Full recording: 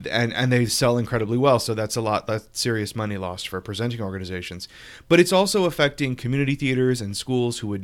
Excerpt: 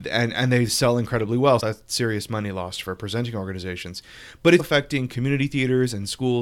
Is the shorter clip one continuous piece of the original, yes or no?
no